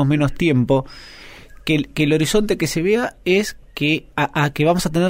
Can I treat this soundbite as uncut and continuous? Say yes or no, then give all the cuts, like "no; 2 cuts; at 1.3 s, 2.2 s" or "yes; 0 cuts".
no; 1 cut; at 4.1 s